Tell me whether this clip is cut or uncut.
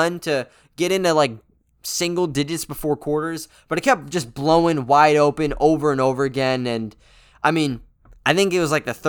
uncut